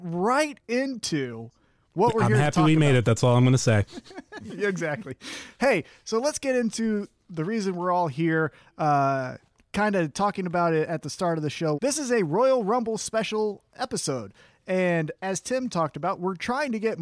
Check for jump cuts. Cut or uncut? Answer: cut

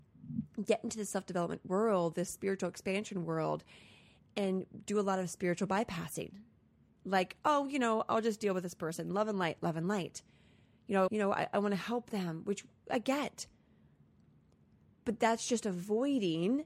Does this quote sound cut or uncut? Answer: cut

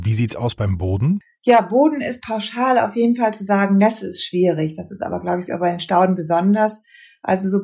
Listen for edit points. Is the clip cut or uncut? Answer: cut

